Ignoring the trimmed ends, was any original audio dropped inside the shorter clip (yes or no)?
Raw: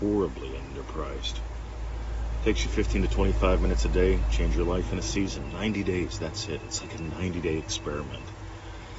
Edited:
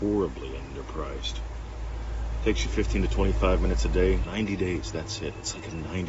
yes